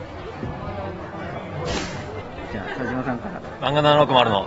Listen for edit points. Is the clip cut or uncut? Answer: cut